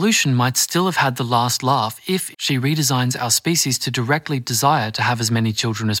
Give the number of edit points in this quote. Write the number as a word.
one